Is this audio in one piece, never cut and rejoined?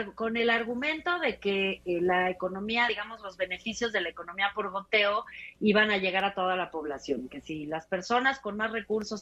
yes; 0 cuts

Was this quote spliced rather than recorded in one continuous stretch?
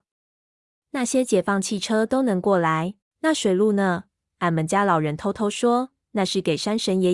yes; 2 cuts; at 3.0 s, 4.2 s

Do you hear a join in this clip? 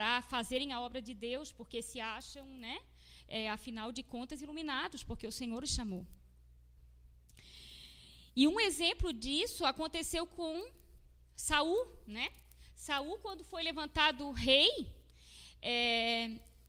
no; 0 cuts

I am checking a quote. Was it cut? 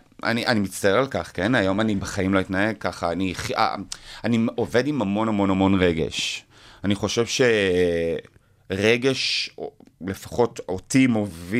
no; 0 cuts

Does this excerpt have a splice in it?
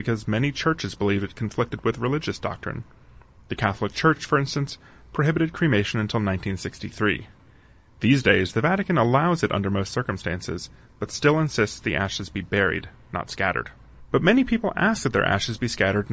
no; 0 cuts

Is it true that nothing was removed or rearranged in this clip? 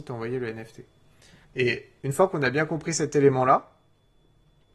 no; 1 cut; at 1.4 s

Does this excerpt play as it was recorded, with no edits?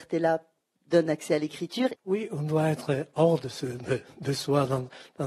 no; 1 cut; at 1.9 s

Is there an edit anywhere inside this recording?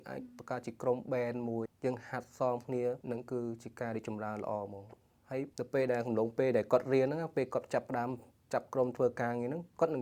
yes; 3 cuts; at 1.7 s, 3.0 s, 5.5 s

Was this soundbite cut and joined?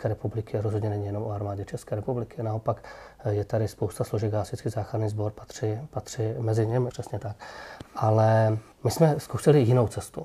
yes; 2 cuts; at 6.9 s, 8.7 s

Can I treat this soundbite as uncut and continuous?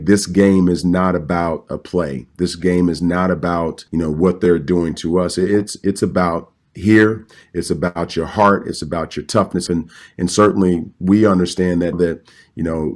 no; 3 cuts; at 3.9 s, 9.7 s, 11.9 s

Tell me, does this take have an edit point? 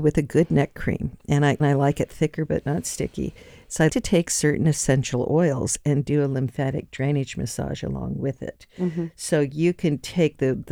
yes; 2 cuts; at 1.6 s, 3.9 s

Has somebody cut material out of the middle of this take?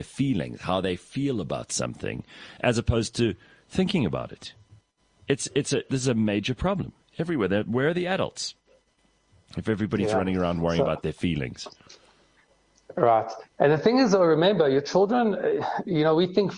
no; 0 cuts

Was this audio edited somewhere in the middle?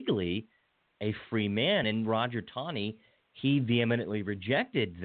no; 0 cuts

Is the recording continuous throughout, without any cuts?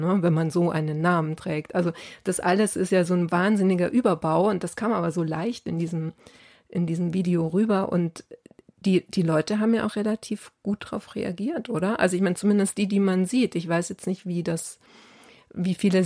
yes; 0 cuts

